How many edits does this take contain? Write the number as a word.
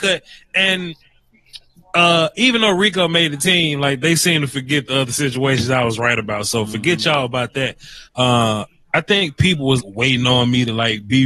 two